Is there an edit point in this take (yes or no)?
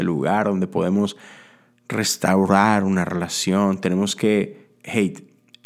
no